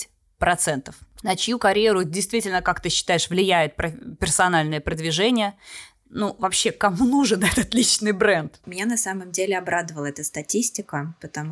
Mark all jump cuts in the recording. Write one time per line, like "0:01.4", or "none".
0:01.2
0:08.6